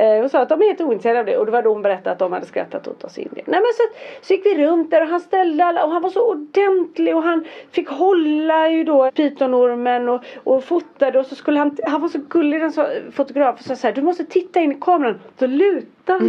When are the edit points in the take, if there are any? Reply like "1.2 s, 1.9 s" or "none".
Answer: 9.1 s